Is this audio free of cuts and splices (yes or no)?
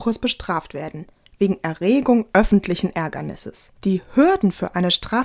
no